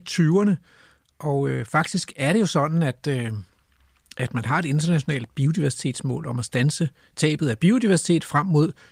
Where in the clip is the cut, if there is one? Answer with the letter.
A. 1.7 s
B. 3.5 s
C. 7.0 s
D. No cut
D